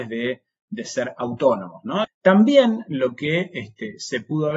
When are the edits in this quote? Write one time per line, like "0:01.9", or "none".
0:02.0